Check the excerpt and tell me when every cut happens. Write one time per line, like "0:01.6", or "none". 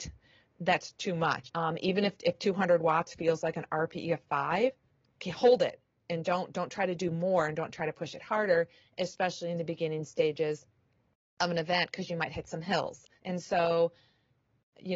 0:01.4
0:13.1